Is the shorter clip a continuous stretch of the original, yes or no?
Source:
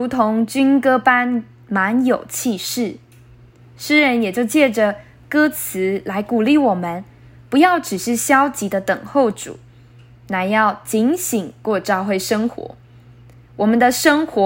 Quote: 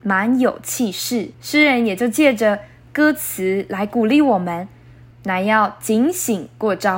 no